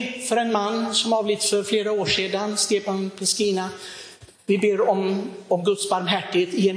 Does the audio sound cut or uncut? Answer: uncut